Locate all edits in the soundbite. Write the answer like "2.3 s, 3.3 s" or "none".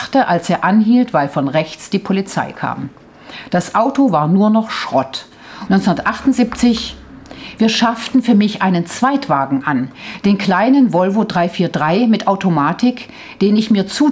5.7 s